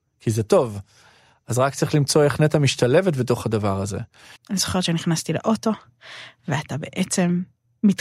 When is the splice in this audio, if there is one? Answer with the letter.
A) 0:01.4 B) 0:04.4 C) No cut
B